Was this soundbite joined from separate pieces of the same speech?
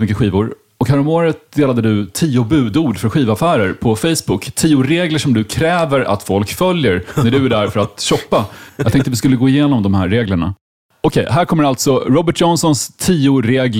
no; 0 cuts

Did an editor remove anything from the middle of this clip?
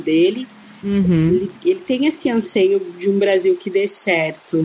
no; 0 cuts

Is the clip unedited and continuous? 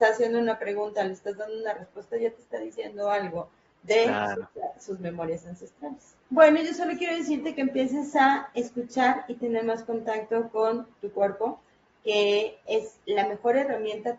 no; 1 cut; at 6.2 s

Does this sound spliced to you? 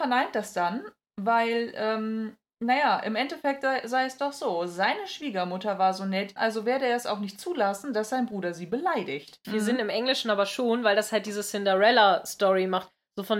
yes; 2 cuts; at 6.4 s, 9.4 s

